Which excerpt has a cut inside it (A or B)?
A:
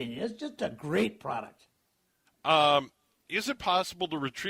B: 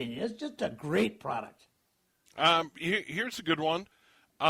A